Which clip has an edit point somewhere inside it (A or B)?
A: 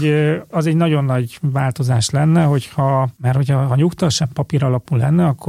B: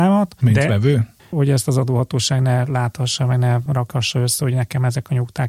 B